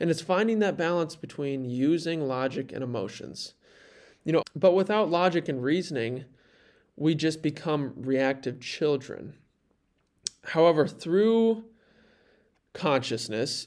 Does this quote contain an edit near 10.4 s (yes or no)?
no